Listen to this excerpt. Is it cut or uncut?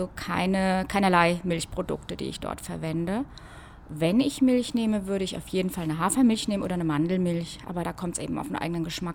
uncut